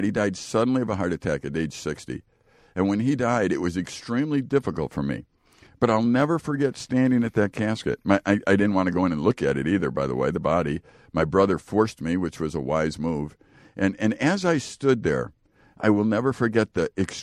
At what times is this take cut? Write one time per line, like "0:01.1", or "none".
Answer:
none